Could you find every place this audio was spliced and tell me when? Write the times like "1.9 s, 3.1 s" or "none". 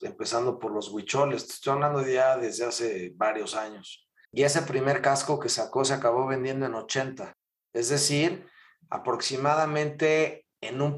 4.2 s